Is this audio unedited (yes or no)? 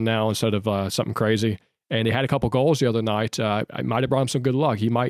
yes